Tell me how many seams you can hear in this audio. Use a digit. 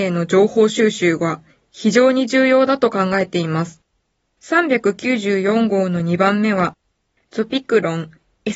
2